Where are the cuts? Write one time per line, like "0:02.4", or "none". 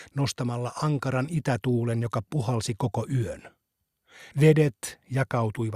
0:04.3